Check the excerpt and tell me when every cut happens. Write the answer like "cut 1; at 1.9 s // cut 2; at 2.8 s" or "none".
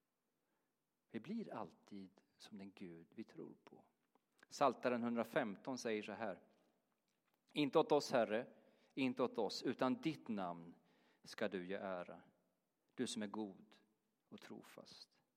none